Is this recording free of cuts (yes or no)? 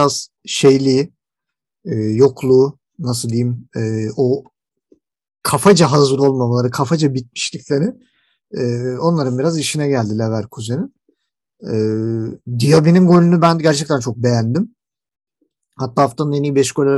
yes